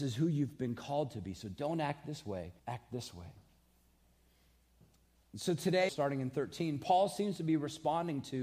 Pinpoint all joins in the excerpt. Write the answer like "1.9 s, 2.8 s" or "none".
2.6 s, 5.9 s